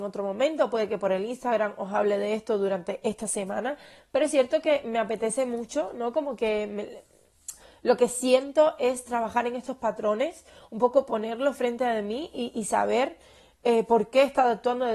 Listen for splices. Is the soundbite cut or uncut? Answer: uncut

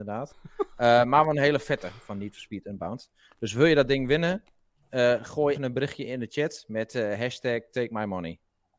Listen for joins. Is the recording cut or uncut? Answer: cut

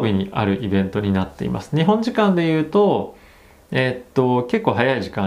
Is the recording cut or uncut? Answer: uncut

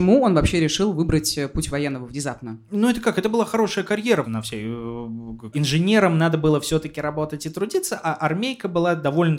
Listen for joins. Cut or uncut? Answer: cut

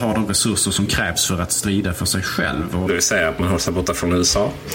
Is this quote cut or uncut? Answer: cut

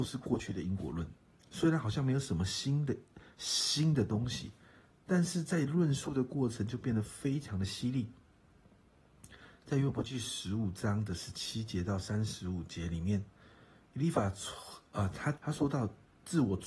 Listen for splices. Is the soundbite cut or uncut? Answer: cut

